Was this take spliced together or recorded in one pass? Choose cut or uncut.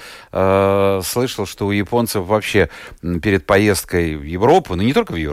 uncut